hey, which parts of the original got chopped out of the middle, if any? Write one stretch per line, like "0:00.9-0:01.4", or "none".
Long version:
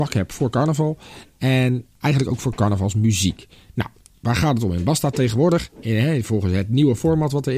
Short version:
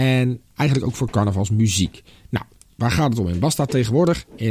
none